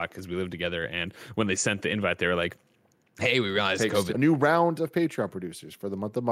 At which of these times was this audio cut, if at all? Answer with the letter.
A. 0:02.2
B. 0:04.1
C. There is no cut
B